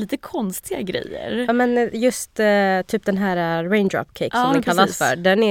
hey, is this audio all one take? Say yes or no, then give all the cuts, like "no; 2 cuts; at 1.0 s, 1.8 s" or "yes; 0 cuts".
yes; 0 cuts